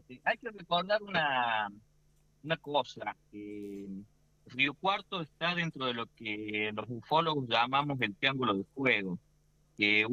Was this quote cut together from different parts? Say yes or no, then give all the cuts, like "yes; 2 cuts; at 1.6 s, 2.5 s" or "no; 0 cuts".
no; 0 cuts